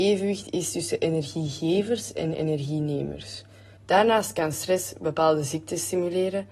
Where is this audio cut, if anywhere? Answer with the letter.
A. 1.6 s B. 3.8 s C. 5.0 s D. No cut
B